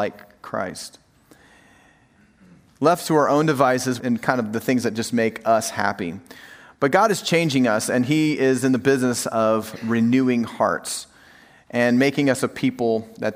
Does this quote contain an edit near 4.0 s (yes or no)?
yes